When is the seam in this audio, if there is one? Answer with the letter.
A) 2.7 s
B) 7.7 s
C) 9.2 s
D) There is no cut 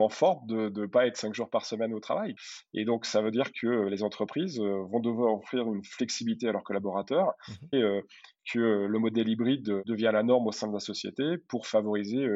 B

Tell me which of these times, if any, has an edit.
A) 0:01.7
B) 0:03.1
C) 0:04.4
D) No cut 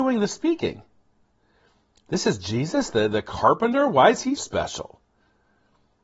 C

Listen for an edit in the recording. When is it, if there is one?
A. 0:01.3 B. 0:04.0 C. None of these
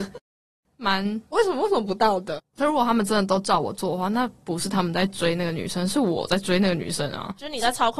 A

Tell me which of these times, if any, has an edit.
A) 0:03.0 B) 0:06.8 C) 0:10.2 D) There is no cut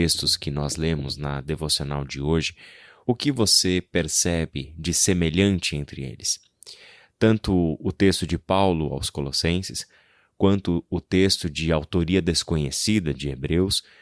D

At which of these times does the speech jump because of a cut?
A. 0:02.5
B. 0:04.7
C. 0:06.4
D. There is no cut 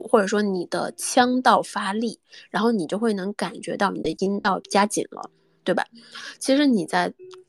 D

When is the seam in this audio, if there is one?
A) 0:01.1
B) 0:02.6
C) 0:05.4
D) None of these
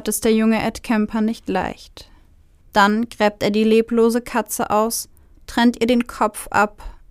B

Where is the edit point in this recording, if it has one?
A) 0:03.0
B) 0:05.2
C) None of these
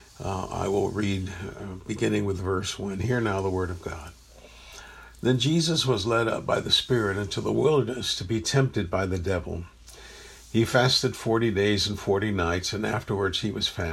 C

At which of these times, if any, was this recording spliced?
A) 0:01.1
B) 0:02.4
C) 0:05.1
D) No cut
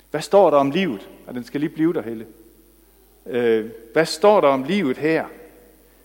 D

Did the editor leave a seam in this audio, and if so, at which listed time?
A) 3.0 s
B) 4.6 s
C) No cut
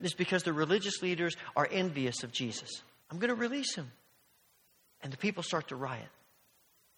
A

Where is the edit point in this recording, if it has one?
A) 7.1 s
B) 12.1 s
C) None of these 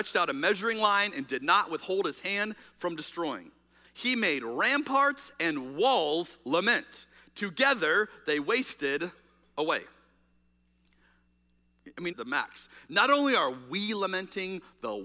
B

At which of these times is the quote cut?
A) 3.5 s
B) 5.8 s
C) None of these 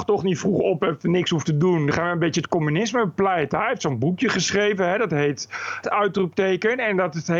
B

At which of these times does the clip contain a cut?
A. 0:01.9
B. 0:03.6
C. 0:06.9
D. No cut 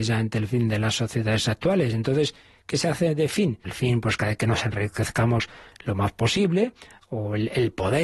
B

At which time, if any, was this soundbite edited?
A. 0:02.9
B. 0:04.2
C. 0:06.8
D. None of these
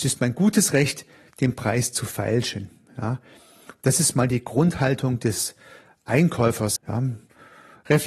C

